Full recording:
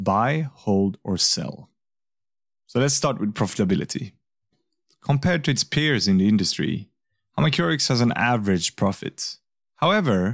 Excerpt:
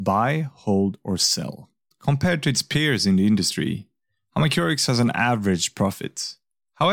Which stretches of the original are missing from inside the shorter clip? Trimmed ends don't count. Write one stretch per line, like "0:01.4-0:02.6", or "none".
0:01.9-0:04.9